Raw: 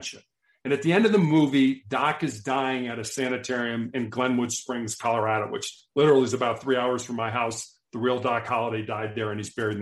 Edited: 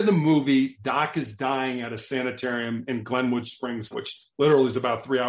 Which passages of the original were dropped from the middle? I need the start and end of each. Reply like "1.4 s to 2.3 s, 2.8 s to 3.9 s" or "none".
5.0 s to 5.5 s